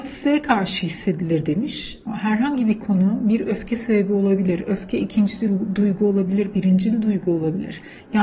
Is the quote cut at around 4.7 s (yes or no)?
no